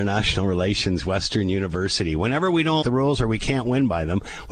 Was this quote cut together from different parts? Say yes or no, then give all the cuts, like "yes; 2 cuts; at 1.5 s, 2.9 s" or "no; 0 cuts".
yes; 1 cut; at 2.8 s